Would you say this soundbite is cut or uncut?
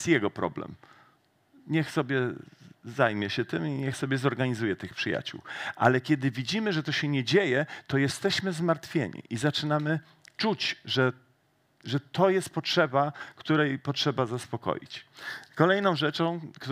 uncut